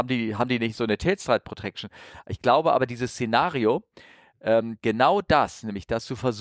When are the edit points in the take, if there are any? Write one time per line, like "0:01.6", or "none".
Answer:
none